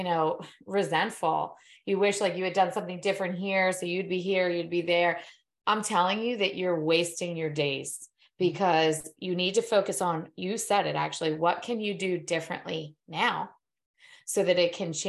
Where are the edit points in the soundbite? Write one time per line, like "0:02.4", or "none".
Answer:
none

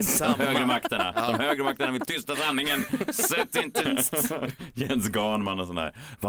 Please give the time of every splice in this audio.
0:03.8

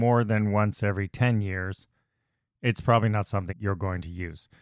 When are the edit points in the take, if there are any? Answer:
0:03.5

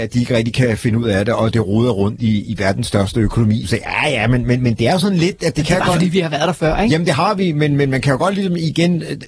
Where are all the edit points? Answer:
0:03.6

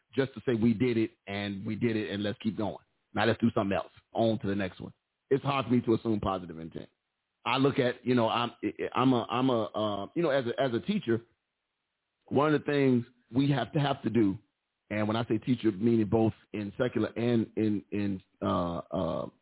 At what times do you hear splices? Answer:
0:04.1

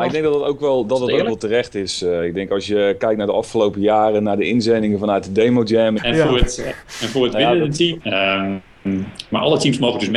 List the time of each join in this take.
0:06.0
0:08.0

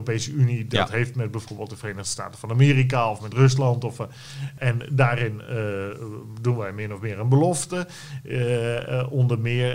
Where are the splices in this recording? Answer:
none

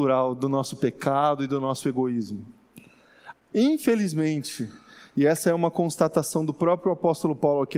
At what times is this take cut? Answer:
0:03.3

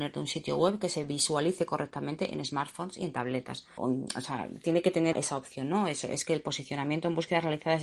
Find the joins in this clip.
0:03.8
0:05.1

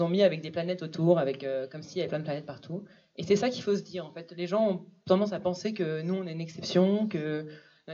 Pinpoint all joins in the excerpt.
none

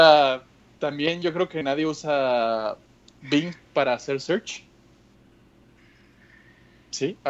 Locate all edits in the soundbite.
none

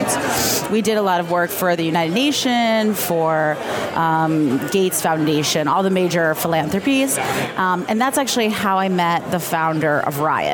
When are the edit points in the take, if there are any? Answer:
none

